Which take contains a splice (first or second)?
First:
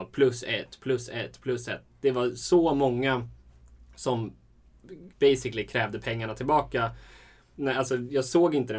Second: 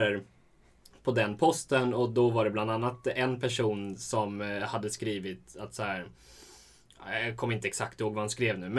first